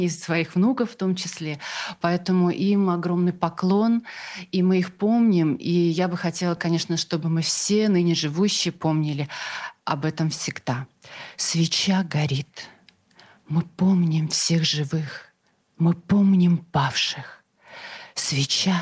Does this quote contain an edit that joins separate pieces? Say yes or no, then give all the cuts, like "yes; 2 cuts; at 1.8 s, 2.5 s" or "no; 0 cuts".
no; 0 cuts